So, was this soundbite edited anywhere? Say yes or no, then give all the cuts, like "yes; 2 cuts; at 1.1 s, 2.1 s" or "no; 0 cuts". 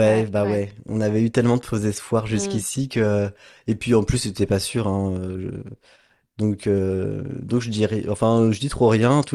no; 0 cuts